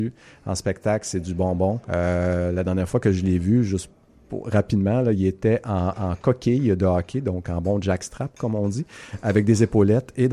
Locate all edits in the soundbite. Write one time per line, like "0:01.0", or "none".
0:01.8

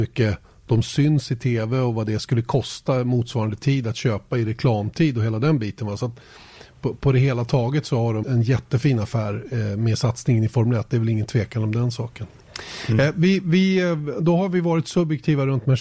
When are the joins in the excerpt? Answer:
0:08.2

